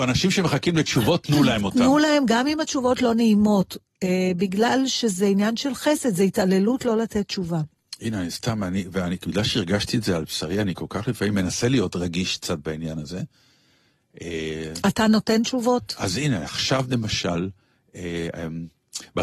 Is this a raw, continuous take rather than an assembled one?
yes; 0 cuts

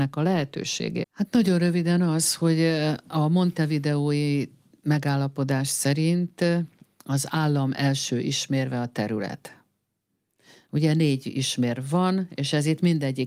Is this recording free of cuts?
no; 1 cut; at 1.0 s

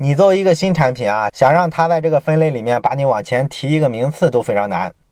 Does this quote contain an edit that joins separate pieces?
no; 0 cuts

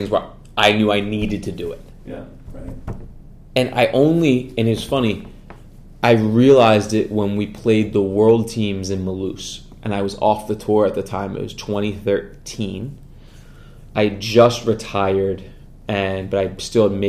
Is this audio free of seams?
no; 1 cut; at 2.4 s

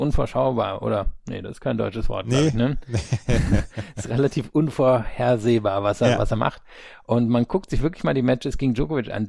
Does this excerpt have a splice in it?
no; 0 cuts

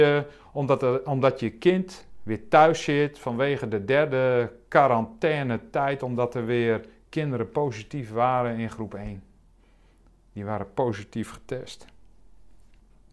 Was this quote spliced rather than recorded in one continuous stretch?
no; 0 cuts

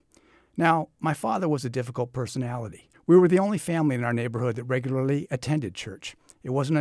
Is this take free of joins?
no; 1 cut; at 2.9 s

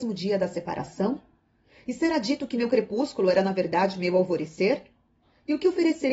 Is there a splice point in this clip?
no; 0 cuts

